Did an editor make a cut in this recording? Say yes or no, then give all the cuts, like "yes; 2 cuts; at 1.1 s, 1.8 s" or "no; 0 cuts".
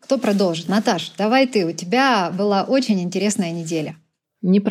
no; 0 cuts